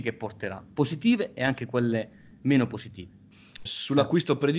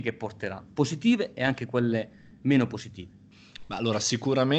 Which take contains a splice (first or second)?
first